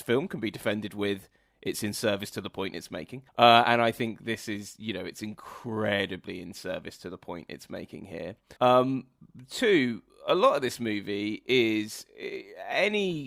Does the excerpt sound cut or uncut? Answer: cut